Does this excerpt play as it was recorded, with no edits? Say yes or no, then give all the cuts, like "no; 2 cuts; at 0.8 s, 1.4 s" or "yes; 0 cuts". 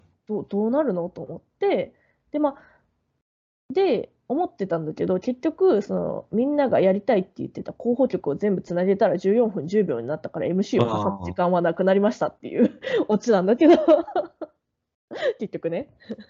yes; 0 cuts